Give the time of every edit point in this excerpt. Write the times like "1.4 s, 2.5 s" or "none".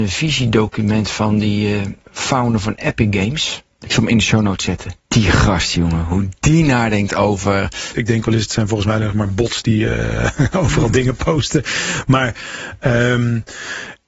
5.0 s, 7.9 s